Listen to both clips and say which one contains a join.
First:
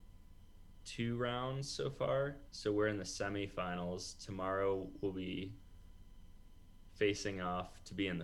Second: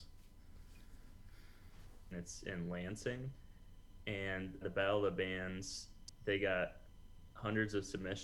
second; 2 cuts; at 2.1 s, 4.6 s

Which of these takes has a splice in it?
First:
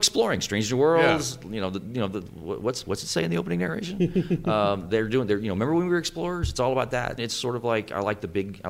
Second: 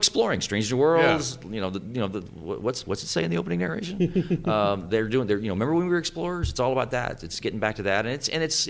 first; 1 cut; at 7.2 s

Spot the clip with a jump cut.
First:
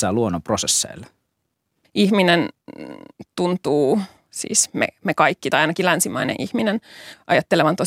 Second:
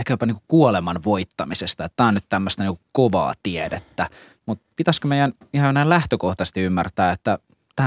first; 1 cut; at 1.8 s

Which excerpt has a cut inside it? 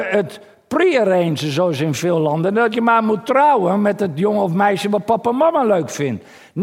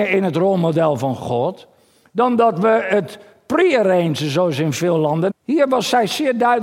second; 1 cut; at 5.3 s

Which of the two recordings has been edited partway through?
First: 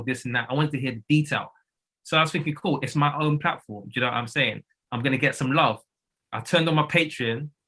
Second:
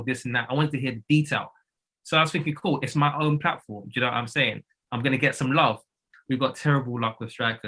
second; 1 cut; at 6.1 s

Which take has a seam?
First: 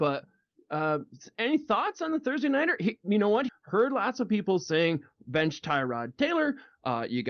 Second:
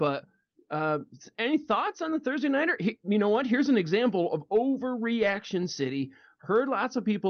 first; 1 cut; at 3.5 s

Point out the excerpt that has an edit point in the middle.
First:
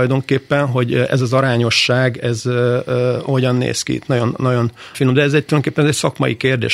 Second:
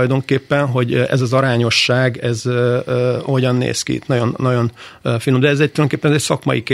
first; 1 cut; at 4.9 s

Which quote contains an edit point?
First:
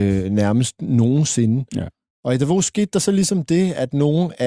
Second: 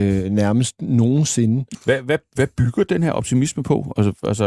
second; 1 cut; at 1.7 s

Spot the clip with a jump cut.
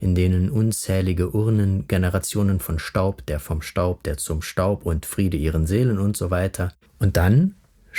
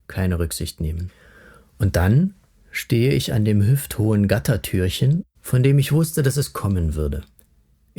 first; 1 cut; at 6.9 s

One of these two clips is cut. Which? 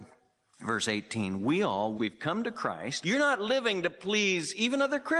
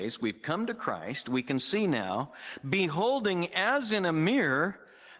first; 2 cuts; at 2.0 s, 3.0 s

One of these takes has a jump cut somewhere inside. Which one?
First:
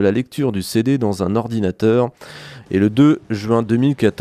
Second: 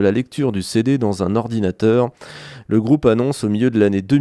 first; 1 cut; at 2.6 s

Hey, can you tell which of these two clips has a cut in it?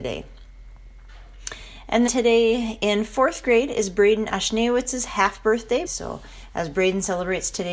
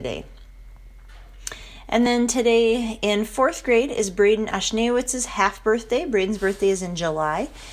first; 2 cuts; at 2.1 s, 5.9 s

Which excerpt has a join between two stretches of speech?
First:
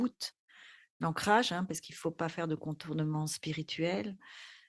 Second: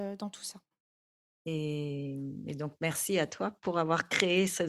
second; 1 cut; at 1.3 s

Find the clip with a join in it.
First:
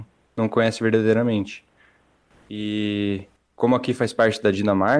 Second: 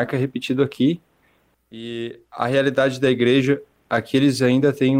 second; 1 cut; at 1.5 s

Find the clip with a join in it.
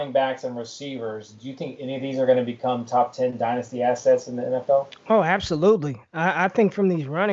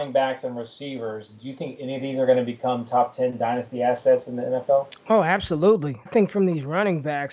second; 1 cut; at 6.1 s

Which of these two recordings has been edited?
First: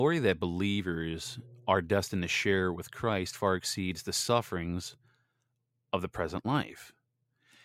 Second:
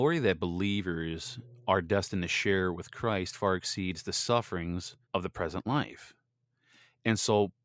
second; 1 cut; at 5.0 s

